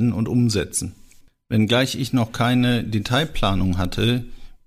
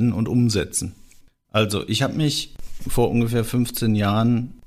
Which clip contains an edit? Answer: second; 1 cut; at 1.4 s

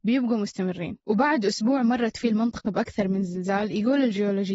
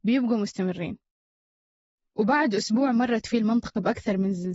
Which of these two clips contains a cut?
first; 1 cut; at 1.0 s

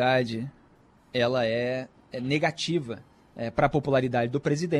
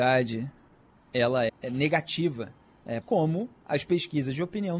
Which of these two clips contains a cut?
second; 2 cuts; at 1.5 s, 3.0 s

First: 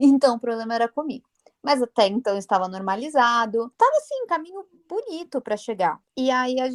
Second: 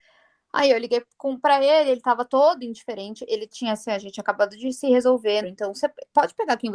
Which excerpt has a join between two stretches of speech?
second; 1 cut; at 5.4 s

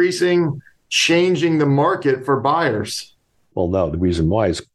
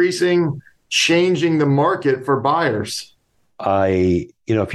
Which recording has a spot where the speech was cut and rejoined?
first; 1 cut; at 3.5 s

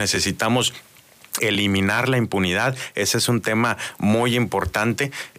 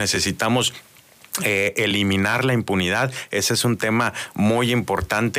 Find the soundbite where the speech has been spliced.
first; 1 cut; at 1.4 s

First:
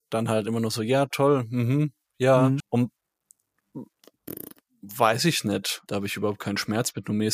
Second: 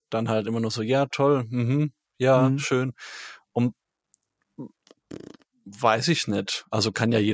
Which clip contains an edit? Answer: first; 2 cuts; at 2.6 s, 5.9 s

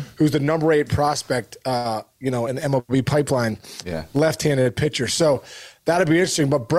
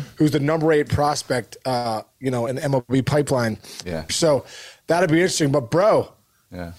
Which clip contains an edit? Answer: second; 1 cut; at 4.1 s

